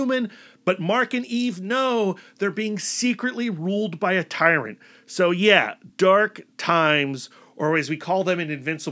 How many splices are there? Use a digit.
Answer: 0